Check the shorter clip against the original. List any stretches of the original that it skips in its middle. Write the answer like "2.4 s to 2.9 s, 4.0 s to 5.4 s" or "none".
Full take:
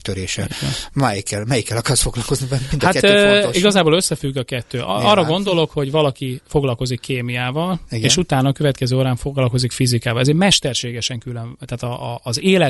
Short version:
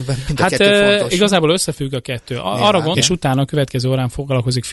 5.4 s to 8.0 s